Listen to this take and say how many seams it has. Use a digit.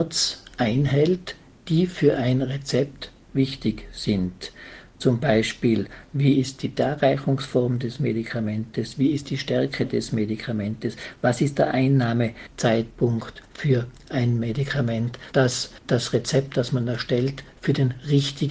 2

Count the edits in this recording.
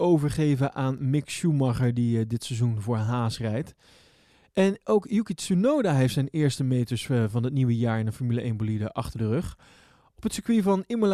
0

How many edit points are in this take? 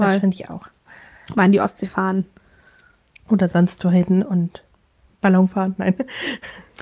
0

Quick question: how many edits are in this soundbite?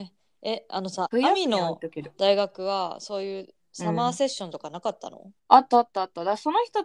1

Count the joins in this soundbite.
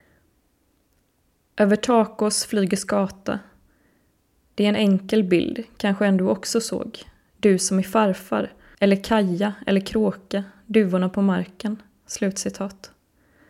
1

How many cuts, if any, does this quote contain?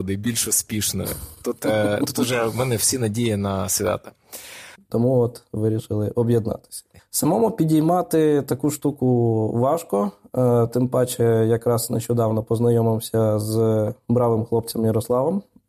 2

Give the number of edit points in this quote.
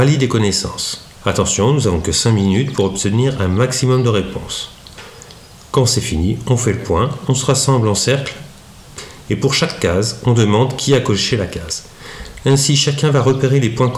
1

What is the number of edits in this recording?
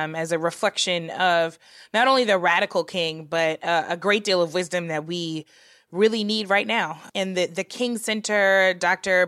0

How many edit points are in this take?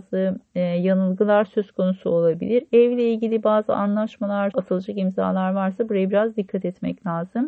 1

